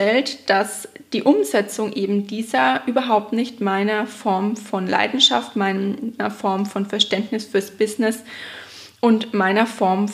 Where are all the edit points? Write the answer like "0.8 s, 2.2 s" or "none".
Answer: none